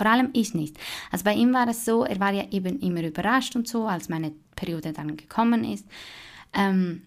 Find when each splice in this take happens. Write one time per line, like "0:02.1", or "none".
none